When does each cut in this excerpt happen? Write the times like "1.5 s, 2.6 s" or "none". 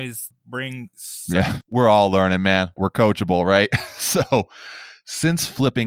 1.6 s, 2.8 s